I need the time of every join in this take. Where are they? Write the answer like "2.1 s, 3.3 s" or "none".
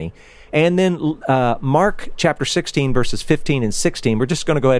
none